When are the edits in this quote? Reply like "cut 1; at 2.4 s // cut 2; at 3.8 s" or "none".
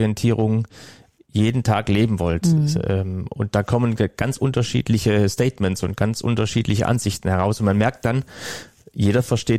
none